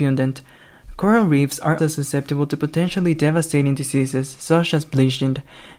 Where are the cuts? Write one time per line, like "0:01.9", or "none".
0:01.8